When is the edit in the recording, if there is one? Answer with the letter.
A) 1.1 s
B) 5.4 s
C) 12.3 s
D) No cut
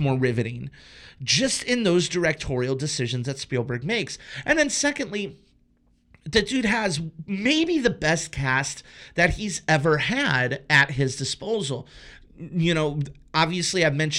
D